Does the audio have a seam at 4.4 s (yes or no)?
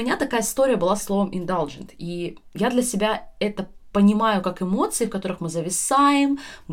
no